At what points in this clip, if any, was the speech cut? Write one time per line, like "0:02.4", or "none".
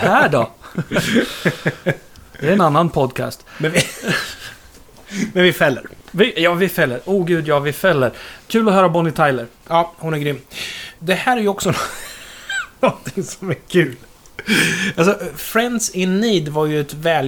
0:02.6